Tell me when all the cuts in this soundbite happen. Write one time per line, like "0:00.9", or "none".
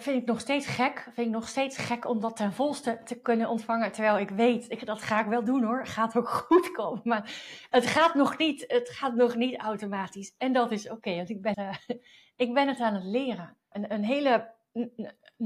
0:11.5
0:13.7